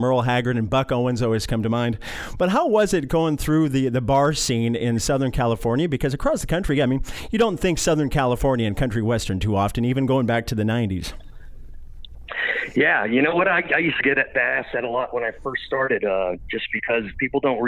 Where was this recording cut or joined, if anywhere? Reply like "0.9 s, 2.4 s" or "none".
none